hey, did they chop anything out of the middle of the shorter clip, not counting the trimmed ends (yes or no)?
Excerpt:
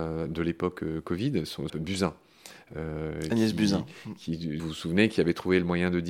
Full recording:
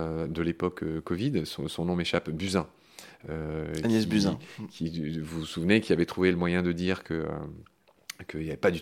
yes